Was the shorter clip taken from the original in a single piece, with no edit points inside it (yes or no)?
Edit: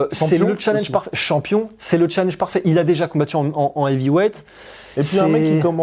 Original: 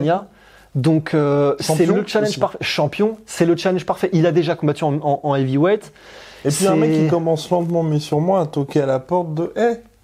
yes